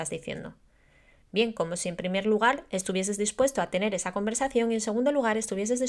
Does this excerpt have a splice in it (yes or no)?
no